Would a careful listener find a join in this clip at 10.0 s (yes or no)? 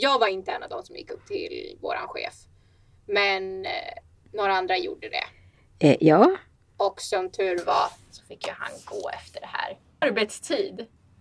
yes